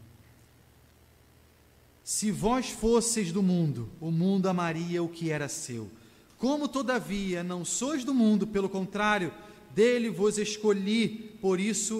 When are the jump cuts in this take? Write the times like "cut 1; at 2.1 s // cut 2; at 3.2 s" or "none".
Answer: none